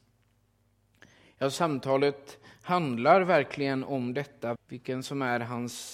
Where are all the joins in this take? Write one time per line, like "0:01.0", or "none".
0:04.6